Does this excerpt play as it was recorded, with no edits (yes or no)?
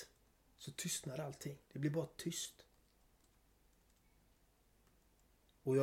no